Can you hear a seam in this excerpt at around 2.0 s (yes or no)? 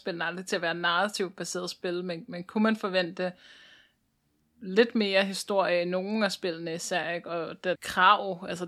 no